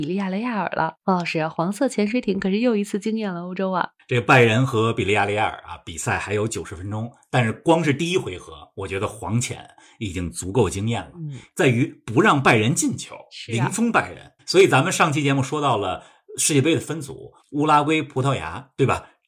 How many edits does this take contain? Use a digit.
3